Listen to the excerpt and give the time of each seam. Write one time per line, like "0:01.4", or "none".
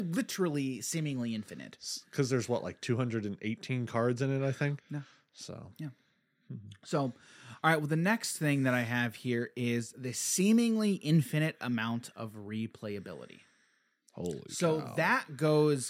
0:04.8